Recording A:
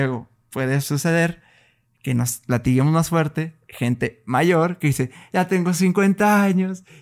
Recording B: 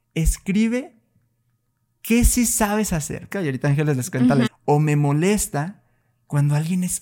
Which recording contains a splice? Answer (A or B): B